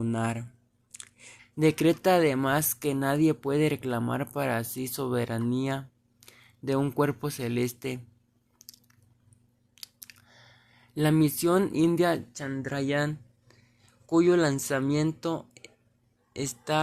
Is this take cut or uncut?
cut